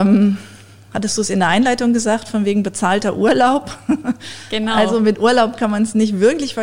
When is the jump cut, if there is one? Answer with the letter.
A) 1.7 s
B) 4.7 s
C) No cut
C